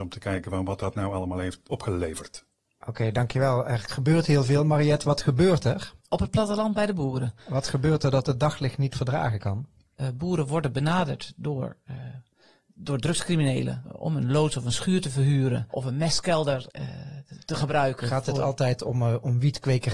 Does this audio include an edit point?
yes; 1 cut; at 6.0 s

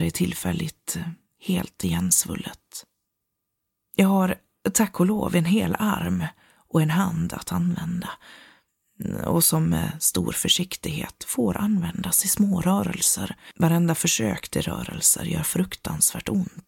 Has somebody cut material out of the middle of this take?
no; 0 cuts

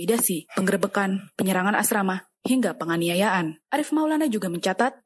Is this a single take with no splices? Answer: no; 1 cut; at 1.3 s

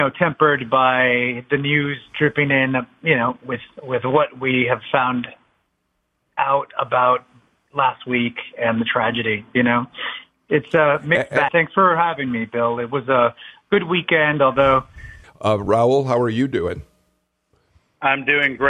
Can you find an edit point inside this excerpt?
yes; 2 cuts; at 11.5 s, 15.2 s

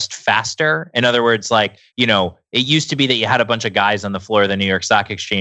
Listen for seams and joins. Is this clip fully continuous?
no; 1 cut; at 1.9 s

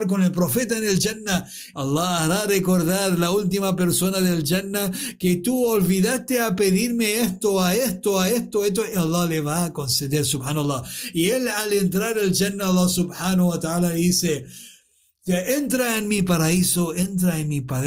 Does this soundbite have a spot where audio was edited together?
yes; 1 cut; at 1.7 s

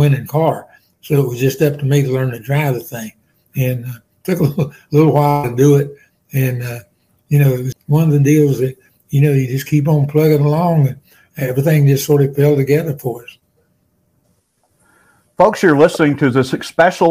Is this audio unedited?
no; 1 cut; at 7.7 s

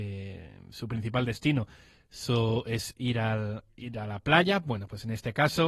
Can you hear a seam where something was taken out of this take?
no; 0 cuts

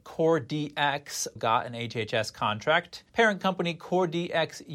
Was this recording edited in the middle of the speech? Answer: yes; 2 cuts; at 1.4 s, 3.1 s

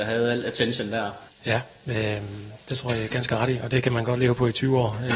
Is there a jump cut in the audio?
yes; 1 cut; at 1.3 s

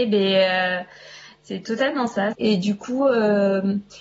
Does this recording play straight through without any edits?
no; 1 cut; at 2.3 s

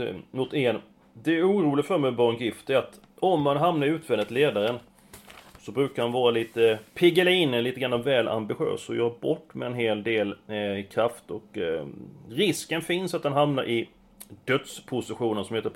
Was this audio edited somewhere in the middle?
no; 0 cuts

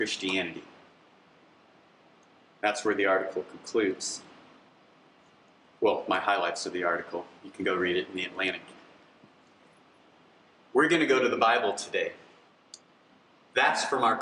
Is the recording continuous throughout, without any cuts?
yes; 0 cuts

